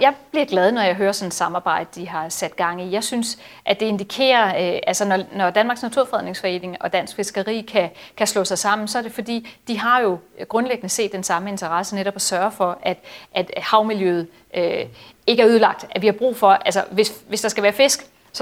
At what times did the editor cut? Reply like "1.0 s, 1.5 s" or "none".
none